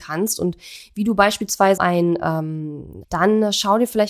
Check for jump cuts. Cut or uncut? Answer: cut